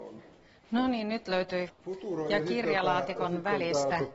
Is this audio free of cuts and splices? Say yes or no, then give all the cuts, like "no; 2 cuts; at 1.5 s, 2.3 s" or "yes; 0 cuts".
no; 1 cut; at 1.7 s